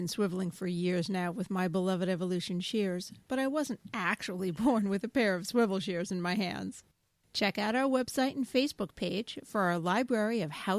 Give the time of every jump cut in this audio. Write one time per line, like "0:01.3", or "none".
none